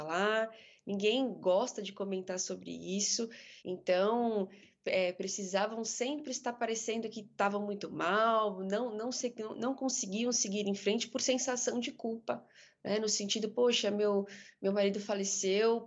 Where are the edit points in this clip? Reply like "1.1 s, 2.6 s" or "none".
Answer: 3.6 s